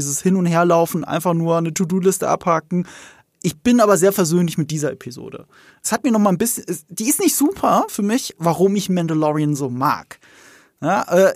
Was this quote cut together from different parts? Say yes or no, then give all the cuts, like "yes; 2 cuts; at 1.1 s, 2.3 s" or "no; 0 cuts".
yes; 2 cuts; at 5.8 s, 8.4 s